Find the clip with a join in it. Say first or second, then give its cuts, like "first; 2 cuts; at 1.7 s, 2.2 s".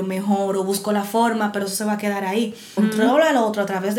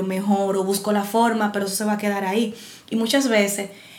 first; 1 cut; at 2.8 s